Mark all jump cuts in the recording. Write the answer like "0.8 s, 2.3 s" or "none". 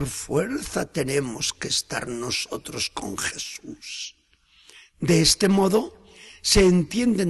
none